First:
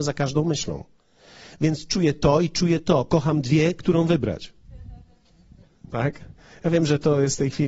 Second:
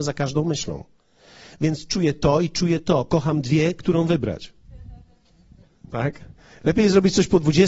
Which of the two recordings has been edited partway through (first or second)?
second